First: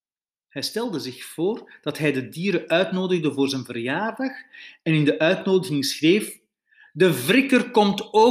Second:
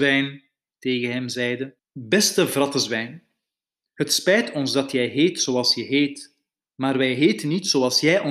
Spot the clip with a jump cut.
second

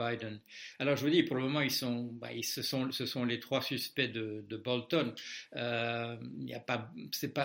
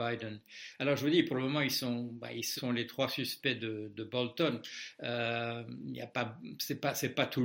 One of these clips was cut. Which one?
second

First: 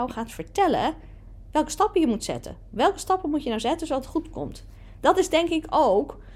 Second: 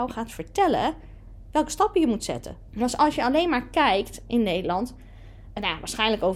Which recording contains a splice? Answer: second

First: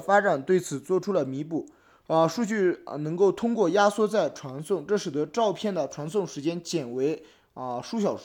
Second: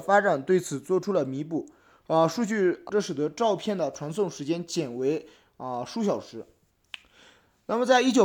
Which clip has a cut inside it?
second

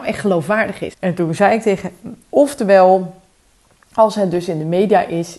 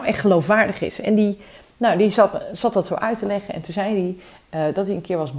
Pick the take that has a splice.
first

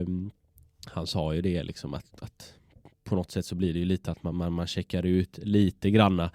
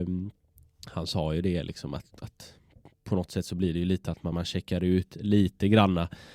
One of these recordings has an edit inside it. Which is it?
second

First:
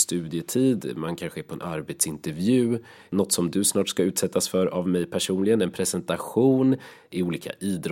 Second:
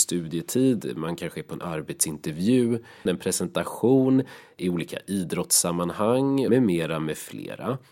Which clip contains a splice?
second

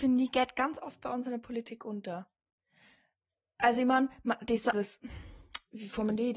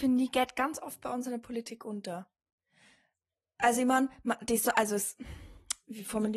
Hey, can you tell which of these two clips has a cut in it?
first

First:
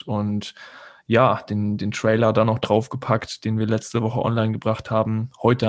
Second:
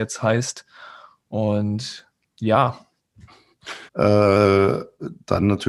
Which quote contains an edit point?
second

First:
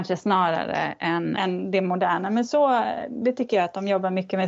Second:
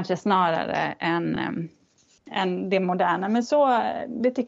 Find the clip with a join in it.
first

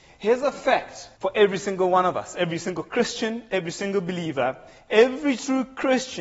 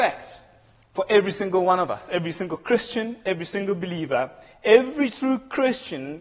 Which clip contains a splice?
first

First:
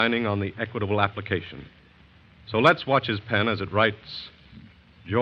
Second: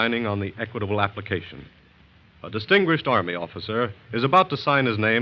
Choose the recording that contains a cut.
second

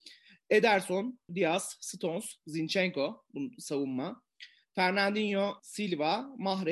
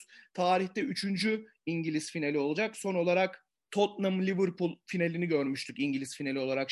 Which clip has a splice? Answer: first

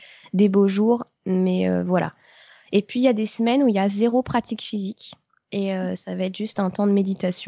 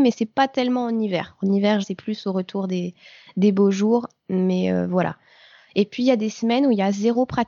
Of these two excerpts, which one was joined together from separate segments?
second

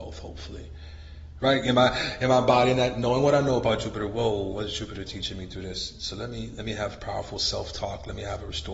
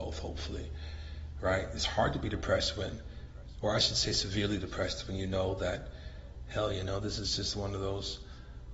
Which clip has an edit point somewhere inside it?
first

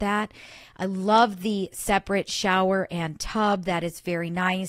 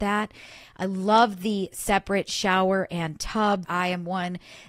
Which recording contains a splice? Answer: second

